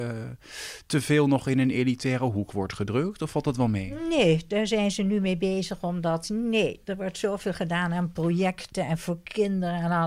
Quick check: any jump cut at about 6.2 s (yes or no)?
no